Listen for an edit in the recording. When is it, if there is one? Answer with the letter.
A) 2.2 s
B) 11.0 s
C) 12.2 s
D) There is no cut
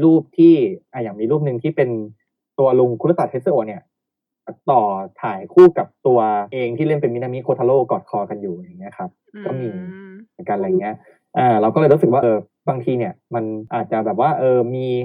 C